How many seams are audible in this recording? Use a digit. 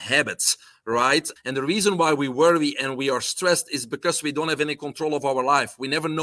1